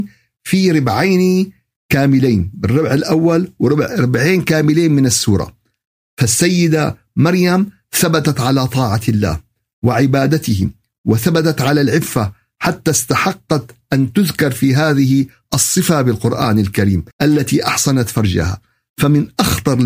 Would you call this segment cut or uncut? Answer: cut